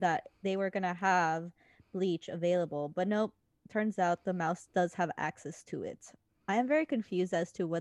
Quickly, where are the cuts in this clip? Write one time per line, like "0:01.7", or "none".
none